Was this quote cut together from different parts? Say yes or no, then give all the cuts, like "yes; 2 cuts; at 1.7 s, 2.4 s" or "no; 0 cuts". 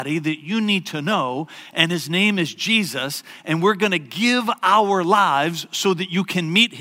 no; 0 cuts